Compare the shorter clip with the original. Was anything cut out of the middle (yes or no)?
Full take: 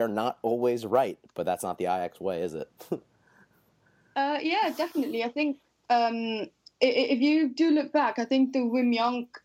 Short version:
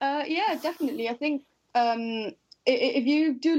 no